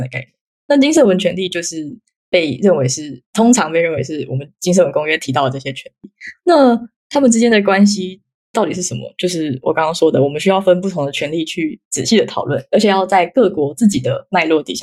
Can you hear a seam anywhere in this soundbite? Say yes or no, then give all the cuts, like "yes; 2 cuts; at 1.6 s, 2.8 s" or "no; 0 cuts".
no; 0 cuts